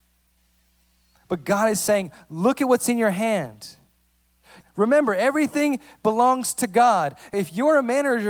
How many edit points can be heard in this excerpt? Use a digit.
2